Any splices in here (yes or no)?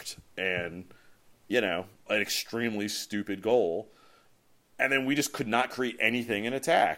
yes